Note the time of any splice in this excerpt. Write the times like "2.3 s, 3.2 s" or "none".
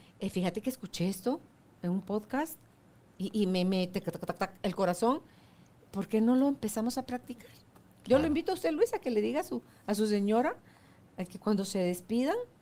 none